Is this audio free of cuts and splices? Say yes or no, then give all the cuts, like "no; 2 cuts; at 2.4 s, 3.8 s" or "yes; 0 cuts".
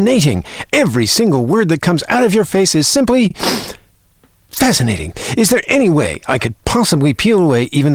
yes; 0 cuts